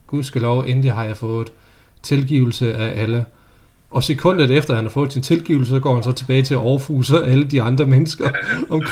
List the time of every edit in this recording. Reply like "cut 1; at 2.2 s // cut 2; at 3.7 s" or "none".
cut 1; at 3.9 s